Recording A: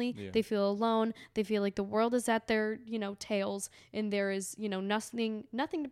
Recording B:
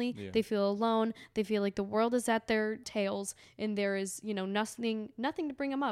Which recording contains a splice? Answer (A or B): B